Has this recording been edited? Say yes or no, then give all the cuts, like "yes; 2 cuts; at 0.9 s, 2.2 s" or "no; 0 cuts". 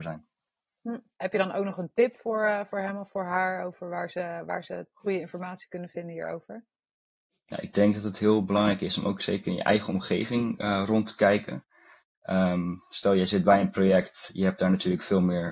yes; 1 cut; at 1.2 s